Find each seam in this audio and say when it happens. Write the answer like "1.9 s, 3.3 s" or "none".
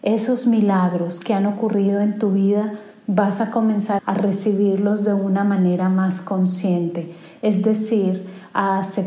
4.0 s